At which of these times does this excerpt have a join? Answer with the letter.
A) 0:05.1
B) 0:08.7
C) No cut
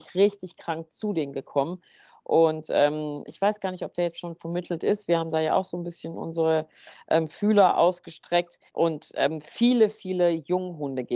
B